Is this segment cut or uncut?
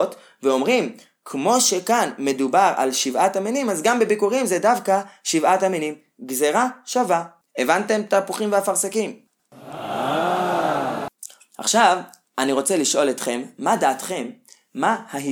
uncut